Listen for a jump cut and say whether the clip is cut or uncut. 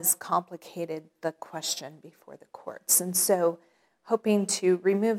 uncut